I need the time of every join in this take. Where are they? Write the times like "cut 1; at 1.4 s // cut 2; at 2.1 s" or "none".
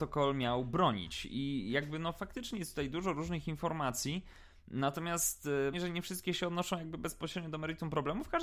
cut 1; at 5.7 s